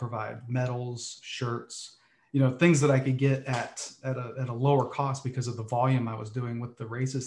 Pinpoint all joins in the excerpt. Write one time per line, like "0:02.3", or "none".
none